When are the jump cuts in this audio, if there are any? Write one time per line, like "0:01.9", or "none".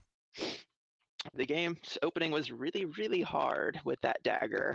0:01.3